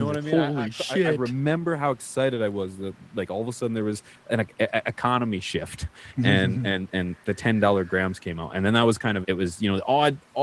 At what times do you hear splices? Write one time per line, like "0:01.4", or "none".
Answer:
0:06.9
0:09.2